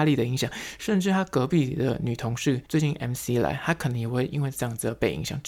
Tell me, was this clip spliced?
yes; 1 cut; at 2.7 s

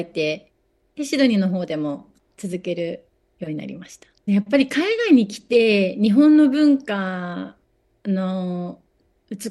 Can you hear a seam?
yes; 1 cut; at 4.3 s

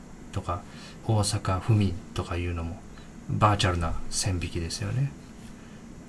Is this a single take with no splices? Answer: no; 1 cut; at 1.0 s

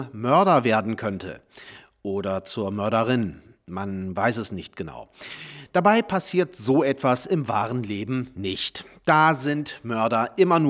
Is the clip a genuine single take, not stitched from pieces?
yes; 0 cuts

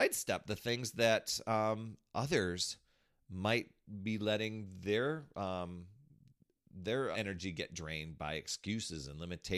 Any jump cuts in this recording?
yes; 1 cut; at 7.1 s

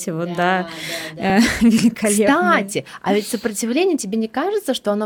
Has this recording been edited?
no; 0 cuts

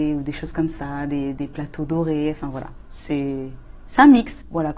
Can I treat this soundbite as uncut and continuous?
yes; 0 cuts

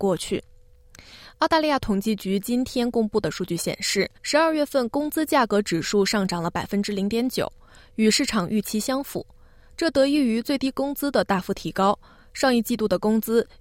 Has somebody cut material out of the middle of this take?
yes; 1 cut; at 4.2 s

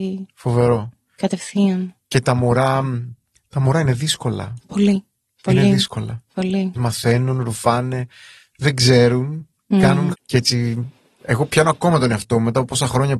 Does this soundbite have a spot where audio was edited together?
yes; 2 cuts; at 6.8 s, 10.1 s

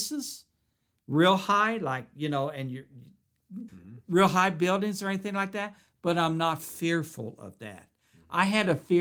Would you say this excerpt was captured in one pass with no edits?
no; 1 cut; at 3.7 s

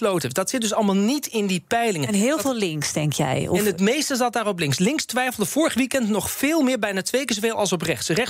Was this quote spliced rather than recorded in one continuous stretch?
no; 0 cuts

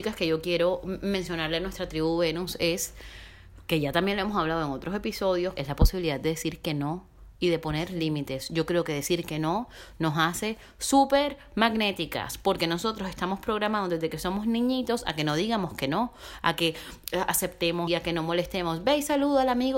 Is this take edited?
yes; 2 cuts; at 5.5 s, 17.9 s

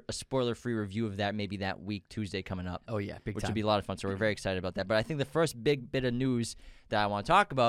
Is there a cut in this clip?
no; 0 cuts

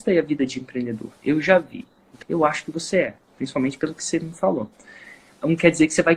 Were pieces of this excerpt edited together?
yes; 1 cut; at 2.2 s

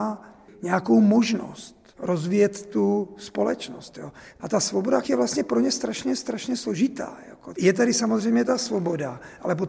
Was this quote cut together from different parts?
yes; 2 cuts; at 5.0 s, 7.5 s

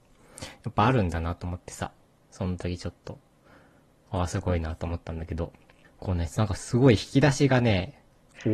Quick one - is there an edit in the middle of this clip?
no; 0 cuts

